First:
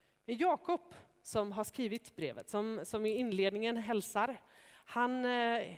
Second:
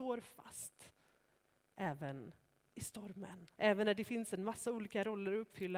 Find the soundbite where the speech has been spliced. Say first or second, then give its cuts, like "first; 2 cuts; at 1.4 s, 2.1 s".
second; 1 cut; at 3.6 s